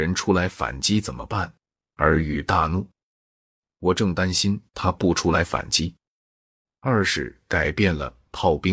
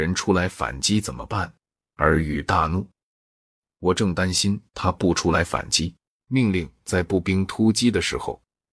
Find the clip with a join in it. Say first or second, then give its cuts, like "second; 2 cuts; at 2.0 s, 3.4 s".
second; 1 cut; at 6.2 s